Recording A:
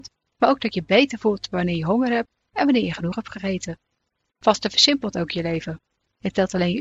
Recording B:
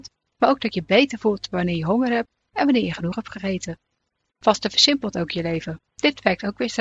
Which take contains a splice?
B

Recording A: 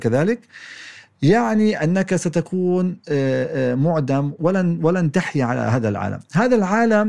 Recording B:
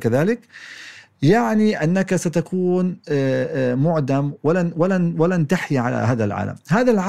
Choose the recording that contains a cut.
A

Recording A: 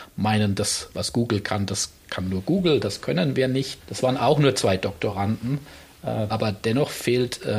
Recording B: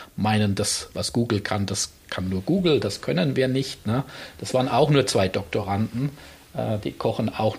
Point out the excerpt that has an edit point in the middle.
A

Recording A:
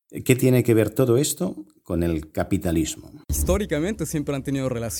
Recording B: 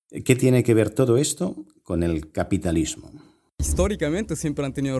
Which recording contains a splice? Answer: A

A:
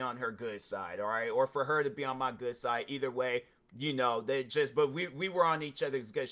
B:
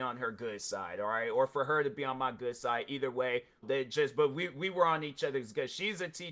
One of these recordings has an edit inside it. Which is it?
B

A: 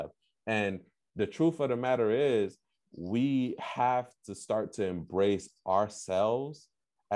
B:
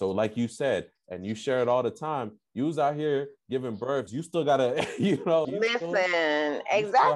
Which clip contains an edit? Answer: B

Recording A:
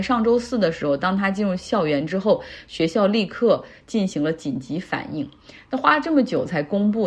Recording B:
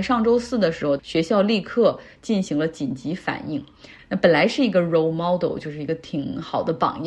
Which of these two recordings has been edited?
B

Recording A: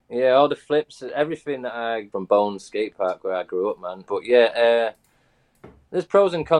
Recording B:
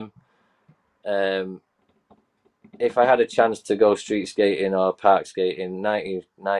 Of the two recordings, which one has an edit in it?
A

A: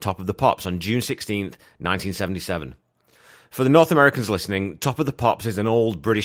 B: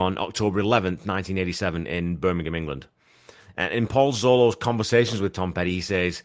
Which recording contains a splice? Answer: B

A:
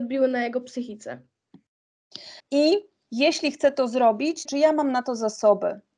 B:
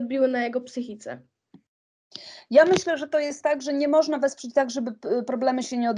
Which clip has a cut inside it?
A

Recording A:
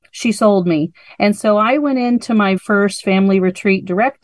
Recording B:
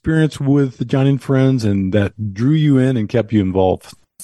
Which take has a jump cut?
A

